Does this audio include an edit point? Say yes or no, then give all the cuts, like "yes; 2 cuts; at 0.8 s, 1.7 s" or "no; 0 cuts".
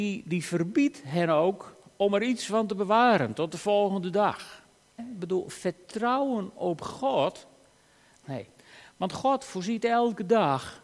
yes; 2 cuts; at 5.0 s, 8.2 s